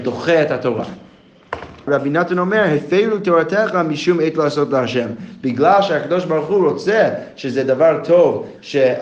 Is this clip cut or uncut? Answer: cut